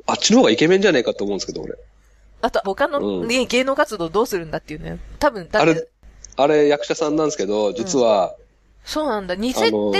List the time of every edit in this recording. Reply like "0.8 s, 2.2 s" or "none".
2.6 s, 8.4 s